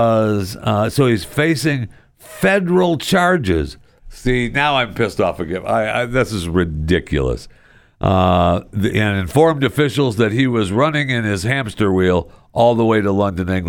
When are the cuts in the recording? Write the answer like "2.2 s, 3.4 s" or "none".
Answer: 4.0 s